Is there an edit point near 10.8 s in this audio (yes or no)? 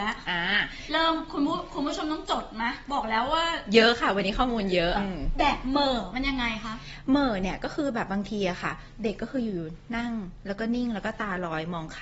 no